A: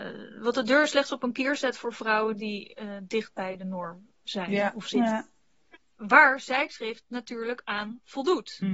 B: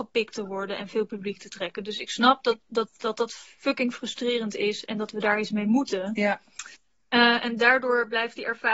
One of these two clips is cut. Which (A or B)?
A